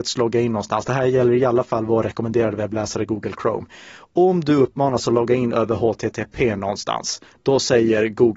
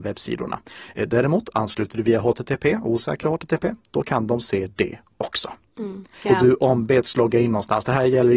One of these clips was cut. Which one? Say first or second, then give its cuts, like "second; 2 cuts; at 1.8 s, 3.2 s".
second; 1 cut; at 6.2 s